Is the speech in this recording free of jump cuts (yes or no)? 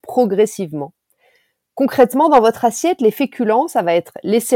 yes